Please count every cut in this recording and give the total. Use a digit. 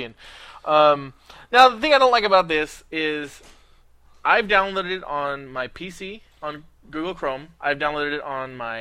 1